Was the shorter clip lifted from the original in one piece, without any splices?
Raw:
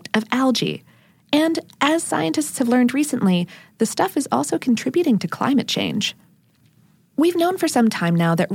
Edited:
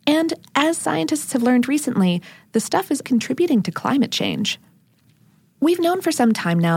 no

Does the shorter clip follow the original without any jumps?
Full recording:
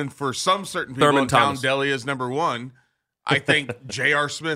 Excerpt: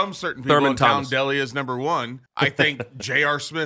no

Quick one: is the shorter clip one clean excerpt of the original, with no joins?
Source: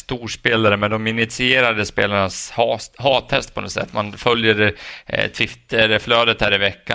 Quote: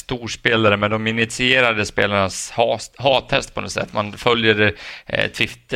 yes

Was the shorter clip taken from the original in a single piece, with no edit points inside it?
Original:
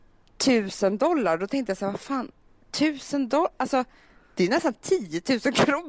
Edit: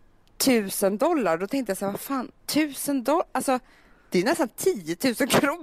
no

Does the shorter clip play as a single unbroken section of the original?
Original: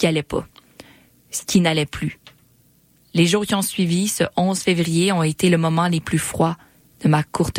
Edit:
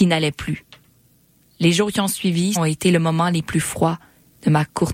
no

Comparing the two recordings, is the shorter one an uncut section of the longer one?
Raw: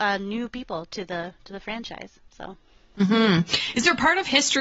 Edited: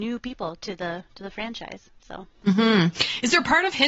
no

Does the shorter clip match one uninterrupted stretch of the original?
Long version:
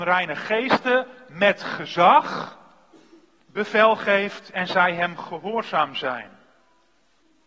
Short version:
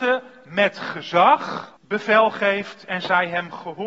no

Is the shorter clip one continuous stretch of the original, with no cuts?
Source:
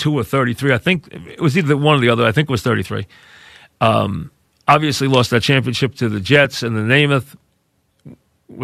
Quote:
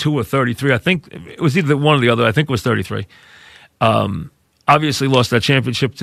yes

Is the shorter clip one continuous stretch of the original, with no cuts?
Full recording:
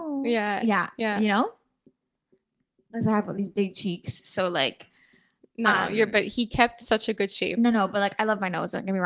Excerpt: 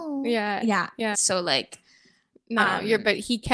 no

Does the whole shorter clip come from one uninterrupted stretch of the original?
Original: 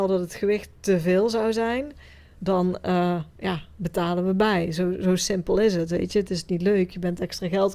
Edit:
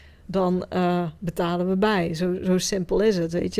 no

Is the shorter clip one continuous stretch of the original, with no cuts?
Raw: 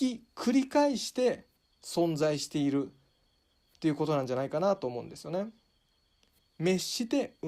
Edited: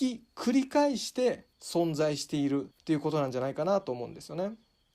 no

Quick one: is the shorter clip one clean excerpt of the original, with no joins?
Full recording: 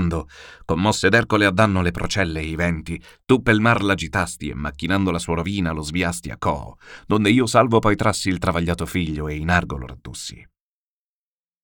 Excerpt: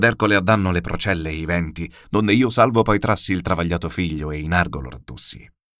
no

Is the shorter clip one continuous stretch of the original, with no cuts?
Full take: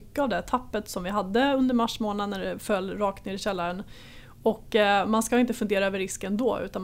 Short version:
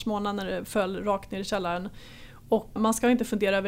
no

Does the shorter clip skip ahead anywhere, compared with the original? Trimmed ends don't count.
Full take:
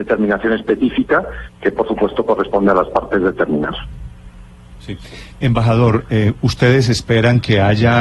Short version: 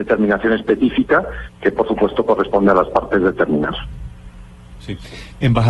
no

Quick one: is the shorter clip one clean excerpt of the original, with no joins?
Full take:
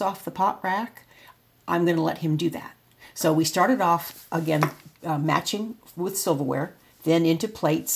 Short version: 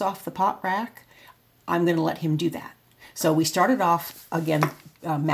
yes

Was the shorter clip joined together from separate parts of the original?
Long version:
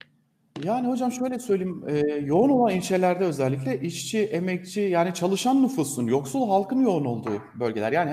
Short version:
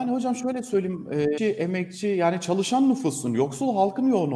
yes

